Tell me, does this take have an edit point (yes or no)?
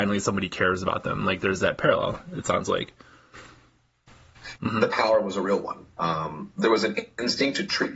yes